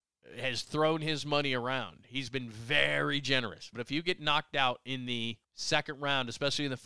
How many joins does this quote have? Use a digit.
2